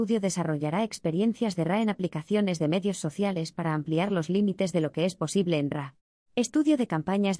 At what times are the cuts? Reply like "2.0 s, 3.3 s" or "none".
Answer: 6.2 s